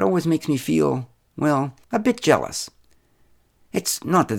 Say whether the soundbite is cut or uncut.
cut